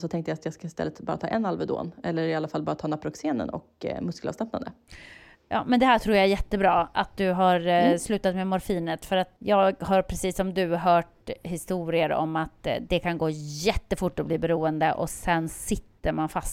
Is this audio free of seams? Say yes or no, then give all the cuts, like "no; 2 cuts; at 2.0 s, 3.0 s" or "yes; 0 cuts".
no; 1 cut; at 9.4 s